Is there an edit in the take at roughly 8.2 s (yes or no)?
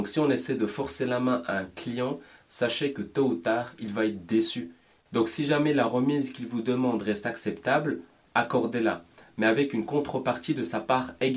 no